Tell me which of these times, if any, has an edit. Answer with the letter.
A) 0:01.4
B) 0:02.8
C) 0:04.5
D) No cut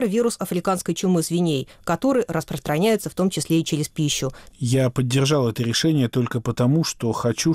C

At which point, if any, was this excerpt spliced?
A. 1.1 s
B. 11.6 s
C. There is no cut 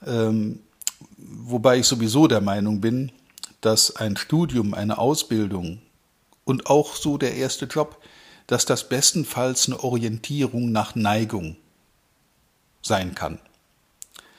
C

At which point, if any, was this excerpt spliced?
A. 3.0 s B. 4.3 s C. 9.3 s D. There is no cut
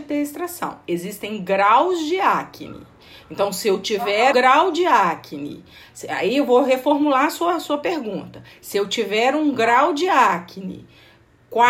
B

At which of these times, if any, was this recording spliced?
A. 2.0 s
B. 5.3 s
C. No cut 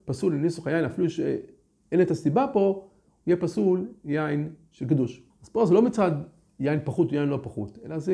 B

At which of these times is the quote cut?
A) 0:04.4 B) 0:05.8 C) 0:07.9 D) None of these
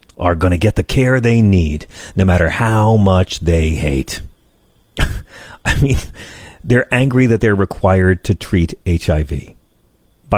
A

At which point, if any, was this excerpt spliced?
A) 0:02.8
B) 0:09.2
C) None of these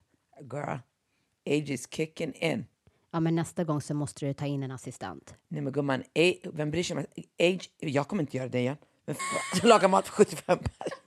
B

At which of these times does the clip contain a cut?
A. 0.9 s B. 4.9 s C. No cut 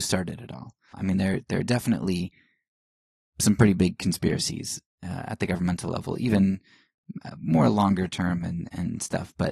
A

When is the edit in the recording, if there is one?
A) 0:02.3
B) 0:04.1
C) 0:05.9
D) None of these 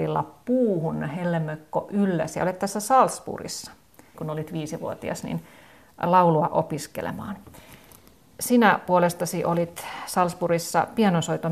B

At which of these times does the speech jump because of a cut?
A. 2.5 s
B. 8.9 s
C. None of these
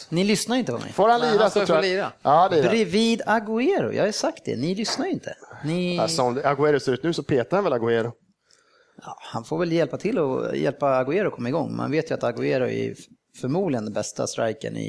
A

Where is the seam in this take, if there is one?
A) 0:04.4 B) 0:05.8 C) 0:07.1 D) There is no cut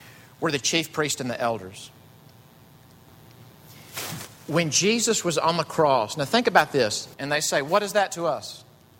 C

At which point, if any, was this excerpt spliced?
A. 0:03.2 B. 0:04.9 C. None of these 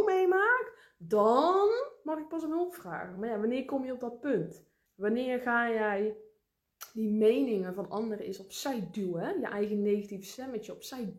B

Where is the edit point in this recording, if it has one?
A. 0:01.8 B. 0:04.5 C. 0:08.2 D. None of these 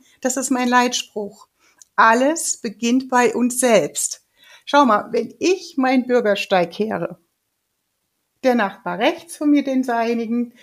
D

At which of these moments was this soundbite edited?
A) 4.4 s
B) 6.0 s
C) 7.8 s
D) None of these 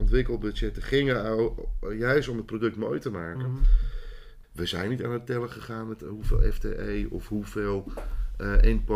A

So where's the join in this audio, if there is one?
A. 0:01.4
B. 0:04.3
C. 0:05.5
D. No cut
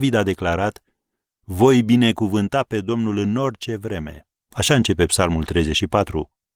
B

